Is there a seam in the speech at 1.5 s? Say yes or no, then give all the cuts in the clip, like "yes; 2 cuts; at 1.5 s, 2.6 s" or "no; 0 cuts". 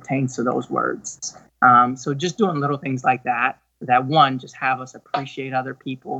no; 0 cuts